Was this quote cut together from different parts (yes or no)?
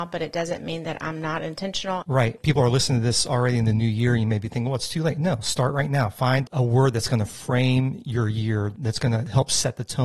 yes